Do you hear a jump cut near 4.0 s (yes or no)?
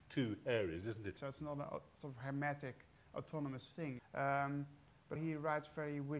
yes